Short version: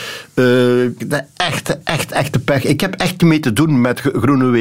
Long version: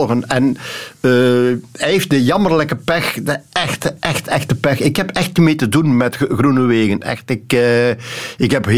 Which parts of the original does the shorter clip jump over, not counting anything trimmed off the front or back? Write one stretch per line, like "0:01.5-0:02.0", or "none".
0:01.7-0:03.2

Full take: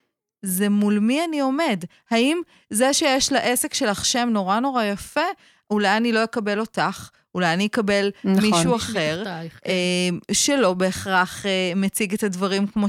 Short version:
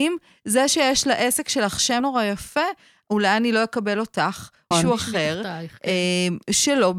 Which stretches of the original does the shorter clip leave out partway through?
0:04.3-0:04.6
0:07.3-0:08.5

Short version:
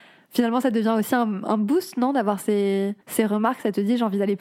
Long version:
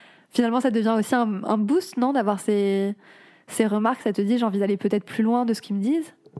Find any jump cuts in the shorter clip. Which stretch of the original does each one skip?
0:03.0-0:03.4

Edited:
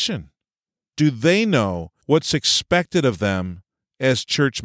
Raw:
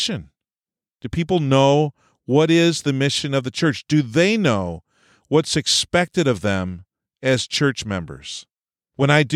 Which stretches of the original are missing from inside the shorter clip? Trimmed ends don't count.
0:00.9-0:03.8
0:04.9-0:05.2

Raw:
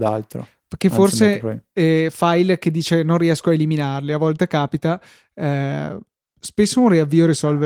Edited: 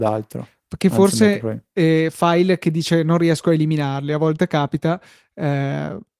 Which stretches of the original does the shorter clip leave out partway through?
none

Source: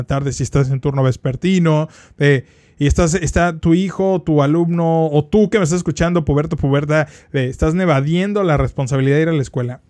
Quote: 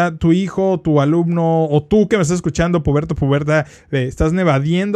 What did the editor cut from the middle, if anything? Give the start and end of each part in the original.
none

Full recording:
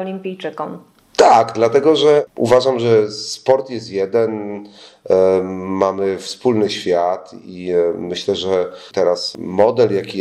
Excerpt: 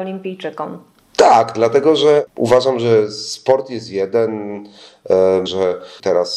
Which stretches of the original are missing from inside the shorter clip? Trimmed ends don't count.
0:05.5-0:08.4

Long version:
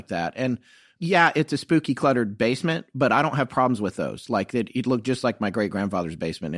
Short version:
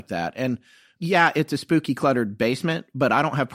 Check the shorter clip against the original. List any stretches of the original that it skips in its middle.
none

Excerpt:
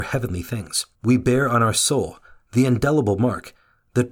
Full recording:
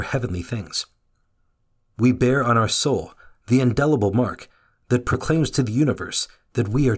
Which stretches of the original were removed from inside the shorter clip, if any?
0:01.0-0:01.9

